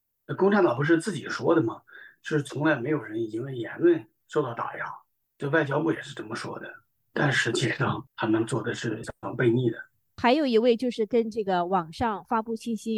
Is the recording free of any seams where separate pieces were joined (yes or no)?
no